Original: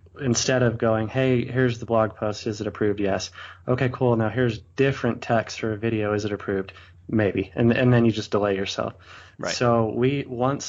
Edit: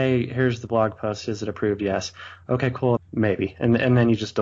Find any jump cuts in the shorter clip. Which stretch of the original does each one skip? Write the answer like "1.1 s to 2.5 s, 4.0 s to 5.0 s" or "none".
4.2 s to 6.9 s

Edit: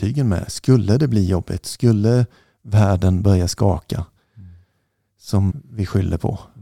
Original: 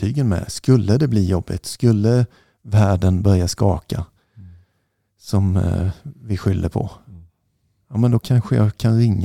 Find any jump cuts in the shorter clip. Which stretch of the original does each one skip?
5.5 s to 6.0 s

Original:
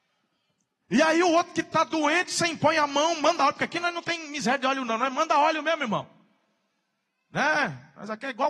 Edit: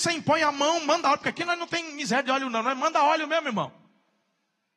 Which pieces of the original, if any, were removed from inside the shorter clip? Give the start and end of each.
none

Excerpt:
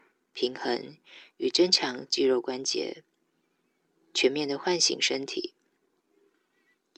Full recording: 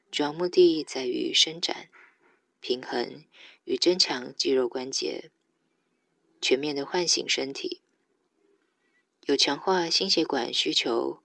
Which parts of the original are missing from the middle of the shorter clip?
none

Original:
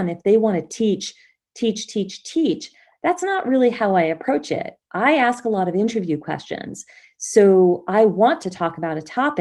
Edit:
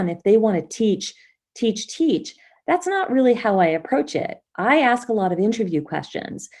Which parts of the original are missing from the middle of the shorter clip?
1.9 s to 2.2 s

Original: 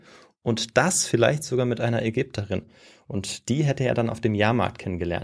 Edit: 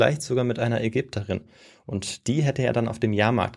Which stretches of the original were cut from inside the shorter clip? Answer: none

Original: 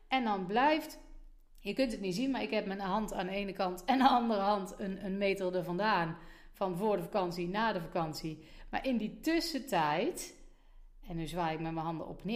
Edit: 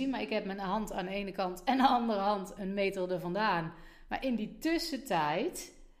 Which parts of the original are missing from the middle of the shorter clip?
4.8 s to 5.0 s, 6.5 s to 8.7 s

